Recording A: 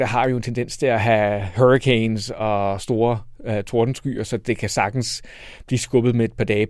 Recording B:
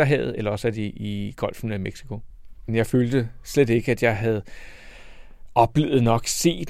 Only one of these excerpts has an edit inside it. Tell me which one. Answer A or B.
B